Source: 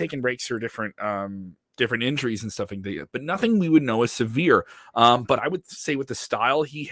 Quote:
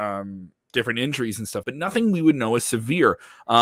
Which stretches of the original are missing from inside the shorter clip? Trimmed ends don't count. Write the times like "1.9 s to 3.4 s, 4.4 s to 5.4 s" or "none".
2.7 s to 3.1 s